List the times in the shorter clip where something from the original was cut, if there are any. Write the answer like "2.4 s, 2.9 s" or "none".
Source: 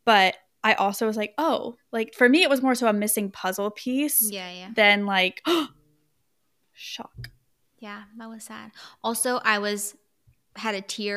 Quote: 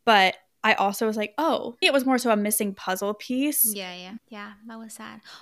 1.8 s, 4.2 s